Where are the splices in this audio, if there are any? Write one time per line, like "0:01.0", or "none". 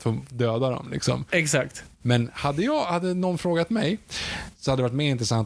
0:02.0